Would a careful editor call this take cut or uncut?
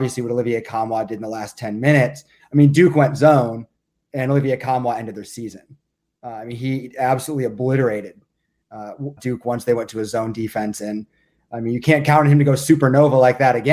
cut